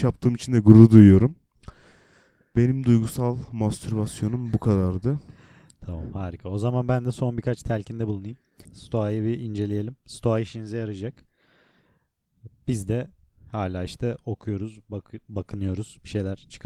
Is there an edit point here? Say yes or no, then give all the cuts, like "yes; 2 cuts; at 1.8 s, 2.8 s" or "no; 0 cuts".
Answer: yes; 1 cut; at 8.6 s